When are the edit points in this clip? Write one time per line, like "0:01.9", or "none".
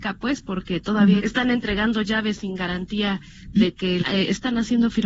0:01.2
0:04.0

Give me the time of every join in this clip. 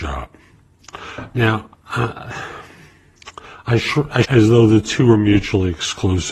0:04.2

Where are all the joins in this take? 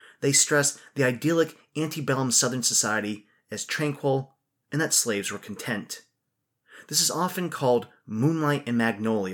0:04.6

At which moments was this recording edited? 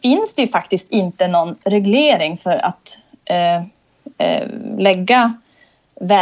none

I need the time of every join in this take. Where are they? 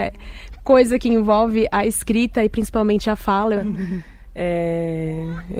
0:03.5

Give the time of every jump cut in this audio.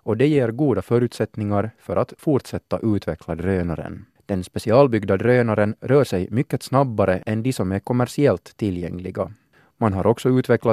0:04.2

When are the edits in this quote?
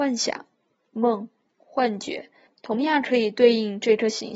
0:02.5

